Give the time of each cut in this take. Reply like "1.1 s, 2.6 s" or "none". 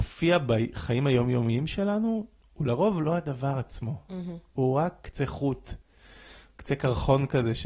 none